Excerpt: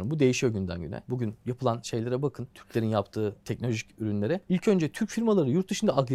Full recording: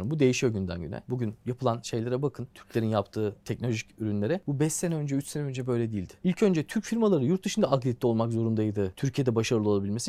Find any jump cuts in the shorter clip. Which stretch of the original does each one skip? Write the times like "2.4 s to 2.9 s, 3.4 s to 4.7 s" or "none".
4.4 s to 6.2 s